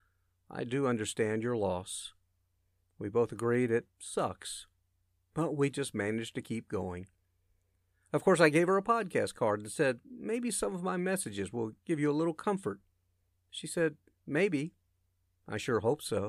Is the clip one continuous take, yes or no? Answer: yes